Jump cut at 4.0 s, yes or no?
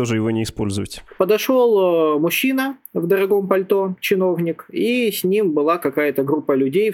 no